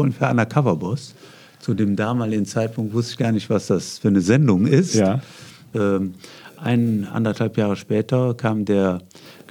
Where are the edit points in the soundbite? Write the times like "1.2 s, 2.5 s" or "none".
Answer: 5.7 s

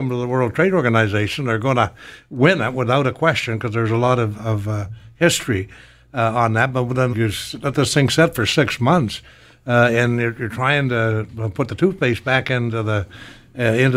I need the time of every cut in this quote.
4.3 s, 7.1 s

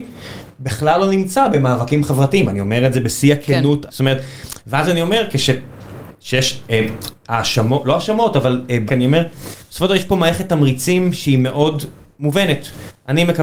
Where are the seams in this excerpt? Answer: 3.9 s, 8.9 s

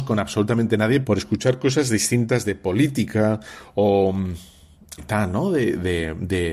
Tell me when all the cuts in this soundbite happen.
1.0 s, 5.0 s

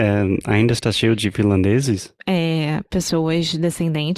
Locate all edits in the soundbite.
2.2 s

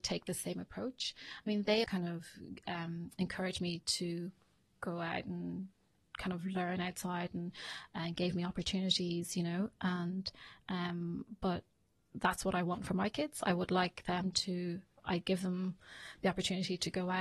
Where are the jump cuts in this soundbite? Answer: 1.8 s

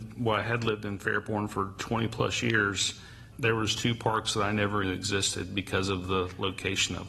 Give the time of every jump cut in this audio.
3.3 s, 4.8 s

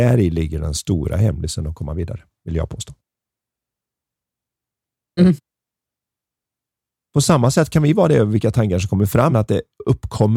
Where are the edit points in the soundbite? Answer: 5.2 s, 9.3 s

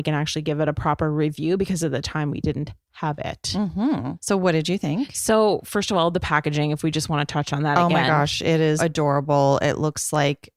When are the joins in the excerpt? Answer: 8.8 s

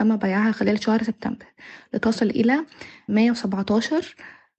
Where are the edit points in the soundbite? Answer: 3.1 s

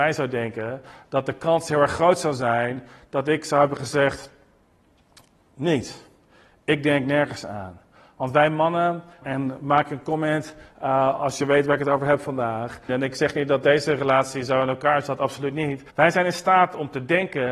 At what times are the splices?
9.2 s, 12.9 s, 15.9 s

